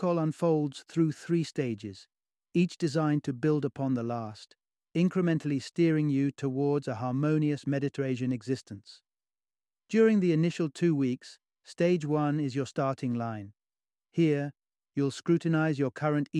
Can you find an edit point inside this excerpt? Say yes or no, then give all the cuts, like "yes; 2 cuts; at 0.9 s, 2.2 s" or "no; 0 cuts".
no; 0 cuts